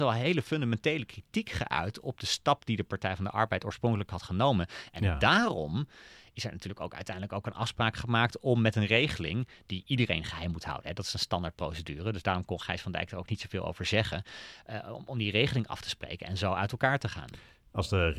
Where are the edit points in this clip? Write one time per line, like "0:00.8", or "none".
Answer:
none